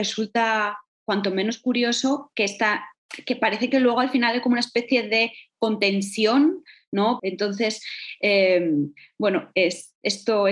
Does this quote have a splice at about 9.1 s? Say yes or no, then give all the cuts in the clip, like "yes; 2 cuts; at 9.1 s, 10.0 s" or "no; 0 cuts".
no; 1 cut; at 7.2 s